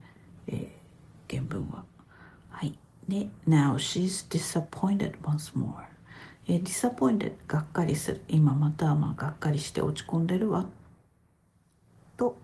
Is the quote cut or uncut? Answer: uncut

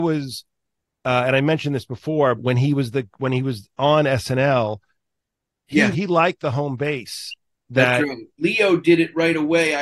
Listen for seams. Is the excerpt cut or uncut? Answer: cut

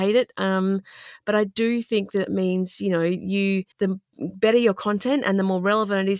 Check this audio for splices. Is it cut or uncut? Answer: cut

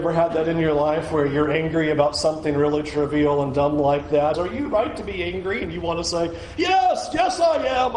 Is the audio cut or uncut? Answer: cut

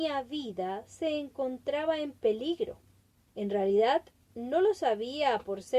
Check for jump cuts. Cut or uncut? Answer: cut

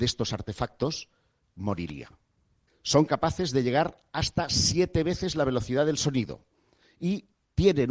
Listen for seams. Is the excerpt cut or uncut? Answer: cut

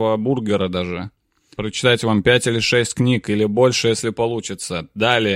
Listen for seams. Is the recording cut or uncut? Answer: cut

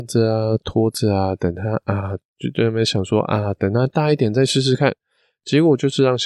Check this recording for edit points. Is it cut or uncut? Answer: uncut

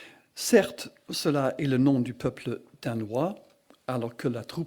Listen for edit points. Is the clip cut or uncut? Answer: uncut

